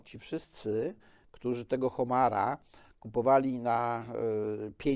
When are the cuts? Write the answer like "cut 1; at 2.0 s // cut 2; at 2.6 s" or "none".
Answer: none